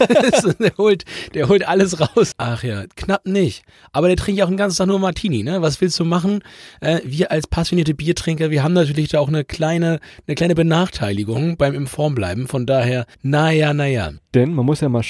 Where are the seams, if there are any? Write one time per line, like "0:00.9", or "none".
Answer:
0:02.3
0:13.1
0:14.2